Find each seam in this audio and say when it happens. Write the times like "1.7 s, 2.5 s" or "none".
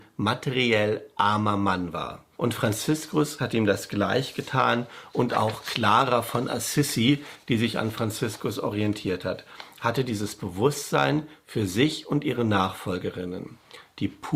2.3 s